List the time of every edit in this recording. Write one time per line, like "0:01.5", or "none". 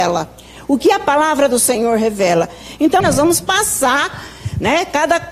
0:03.0

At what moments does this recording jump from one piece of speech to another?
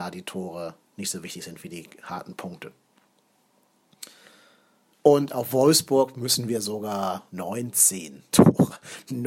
0:04.9
0:07.3

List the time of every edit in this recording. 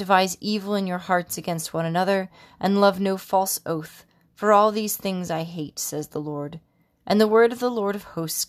none

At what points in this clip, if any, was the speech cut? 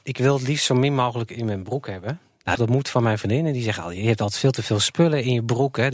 0:02.6

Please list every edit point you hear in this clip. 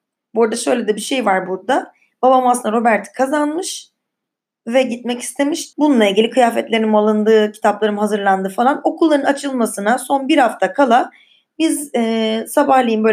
0:05.7

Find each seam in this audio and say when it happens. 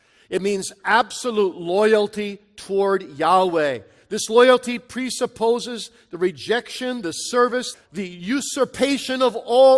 0:07.7

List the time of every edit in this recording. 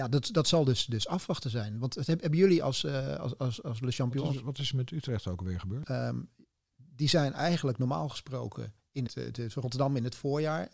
0:05.8
0:09.1

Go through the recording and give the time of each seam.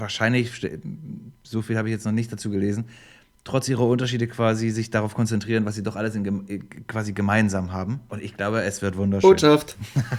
none

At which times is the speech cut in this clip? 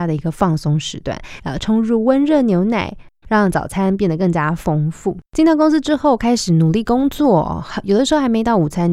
0:01.4
0:03.2
0:05.2

